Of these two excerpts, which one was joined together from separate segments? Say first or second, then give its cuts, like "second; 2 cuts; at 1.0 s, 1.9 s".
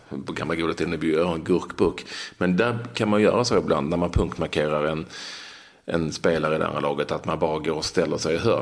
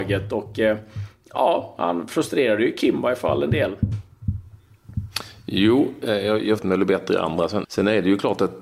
second; 2 cuts; at 6.6 s, 7.6 s